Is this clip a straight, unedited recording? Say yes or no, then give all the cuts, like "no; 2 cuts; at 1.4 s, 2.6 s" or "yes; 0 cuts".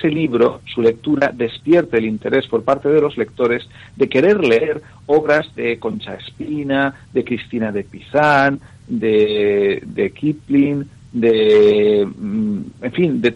yes; 0 cuts